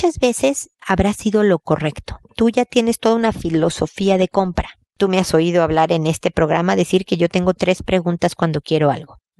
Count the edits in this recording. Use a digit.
1